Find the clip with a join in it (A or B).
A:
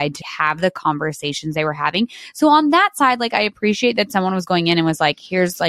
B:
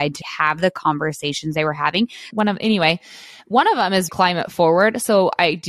B